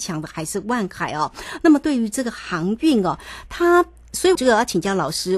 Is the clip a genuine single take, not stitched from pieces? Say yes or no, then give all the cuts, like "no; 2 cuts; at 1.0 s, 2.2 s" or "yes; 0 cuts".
no; 1 cut; at 4.4 s